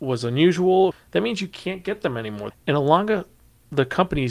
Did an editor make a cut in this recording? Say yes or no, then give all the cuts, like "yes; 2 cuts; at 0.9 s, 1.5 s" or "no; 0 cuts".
yes; 2 cuts; at 0.9 s, 2.5 s